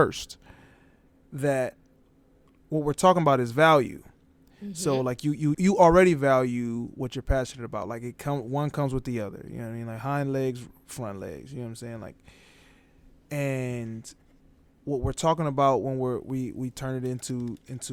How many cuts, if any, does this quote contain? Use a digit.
1